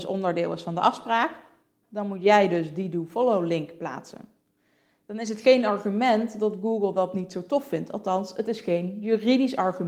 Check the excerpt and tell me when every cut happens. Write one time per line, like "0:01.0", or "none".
0:01.8